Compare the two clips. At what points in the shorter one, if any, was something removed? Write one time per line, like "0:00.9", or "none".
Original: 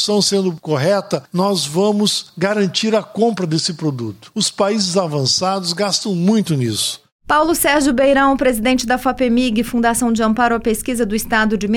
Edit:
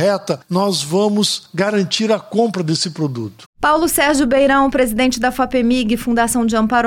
0:03.5